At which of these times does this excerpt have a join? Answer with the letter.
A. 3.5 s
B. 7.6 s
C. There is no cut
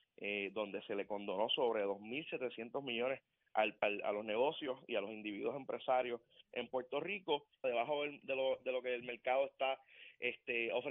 B